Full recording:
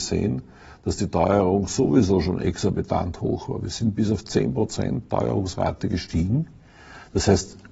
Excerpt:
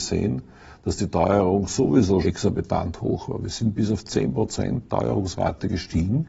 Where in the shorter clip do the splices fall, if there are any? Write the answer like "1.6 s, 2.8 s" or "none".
2.2 s

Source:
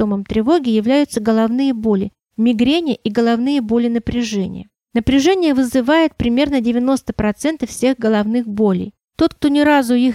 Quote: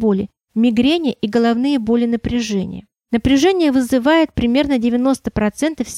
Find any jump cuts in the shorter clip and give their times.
none

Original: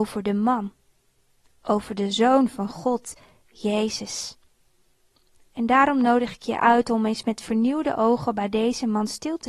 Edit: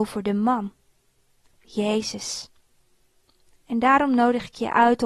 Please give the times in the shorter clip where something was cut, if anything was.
1.5 s

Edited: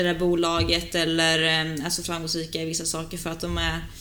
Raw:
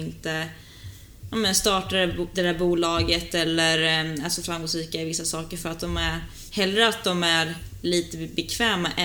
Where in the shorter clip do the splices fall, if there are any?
none

